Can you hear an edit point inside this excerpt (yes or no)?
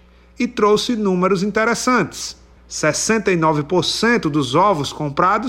yes